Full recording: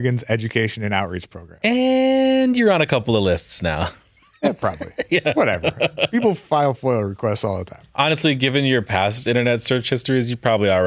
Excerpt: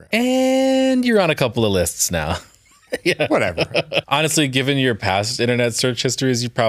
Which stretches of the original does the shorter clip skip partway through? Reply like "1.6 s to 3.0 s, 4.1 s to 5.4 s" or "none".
4.4 s to 4.9 s, 6.1 s to 7.9 s